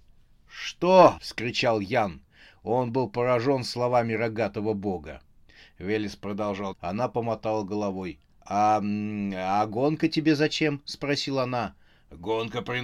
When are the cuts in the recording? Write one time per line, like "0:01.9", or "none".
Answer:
0:01.2
0:06.7
0:08.3